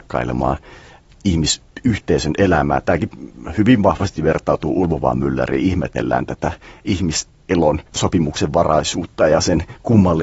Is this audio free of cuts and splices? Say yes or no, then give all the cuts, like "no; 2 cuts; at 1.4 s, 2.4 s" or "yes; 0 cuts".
no; 1 cut; at 7.9 s